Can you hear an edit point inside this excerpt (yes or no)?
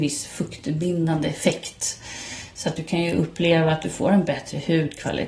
no